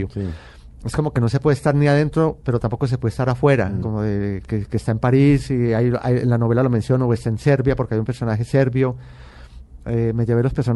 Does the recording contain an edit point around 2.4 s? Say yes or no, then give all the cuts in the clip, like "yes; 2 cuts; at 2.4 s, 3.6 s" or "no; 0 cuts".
no; 2 cuts; at 3.8 s, 9.8 s